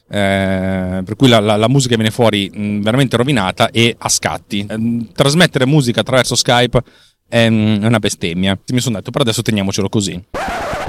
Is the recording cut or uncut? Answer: cut